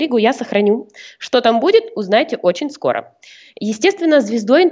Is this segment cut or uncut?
uncut